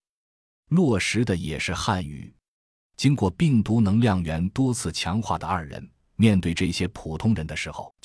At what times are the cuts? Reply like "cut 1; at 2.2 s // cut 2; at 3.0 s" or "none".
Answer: none